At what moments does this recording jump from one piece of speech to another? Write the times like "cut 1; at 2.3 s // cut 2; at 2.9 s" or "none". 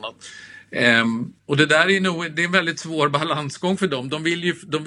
cut 1; at 1.4 s